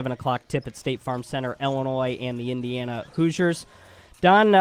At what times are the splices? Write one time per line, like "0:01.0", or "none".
none